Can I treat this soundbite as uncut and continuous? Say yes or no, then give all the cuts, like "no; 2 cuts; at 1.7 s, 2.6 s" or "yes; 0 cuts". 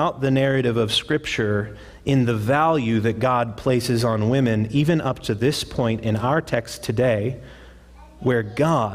yes; 0 cuts